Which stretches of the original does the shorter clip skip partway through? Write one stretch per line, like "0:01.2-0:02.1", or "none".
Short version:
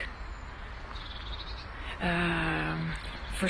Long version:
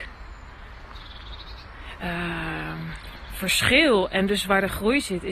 none